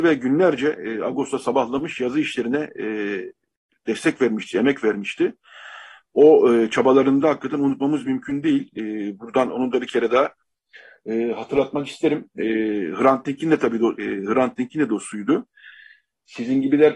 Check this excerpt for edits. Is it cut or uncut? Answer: cut